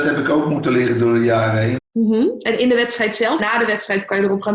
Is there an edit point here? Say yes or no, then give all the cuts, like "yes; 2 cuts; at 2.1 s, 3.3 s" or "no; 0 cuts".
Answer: yes; 2 cuts; at 1.8 s, 3.4 s